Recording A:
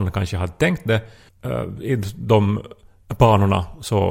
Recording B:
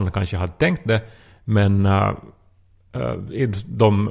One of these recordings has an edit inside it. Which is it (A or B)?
A